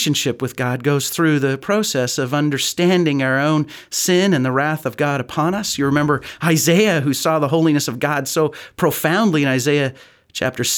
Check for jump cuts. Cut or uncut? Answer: uncut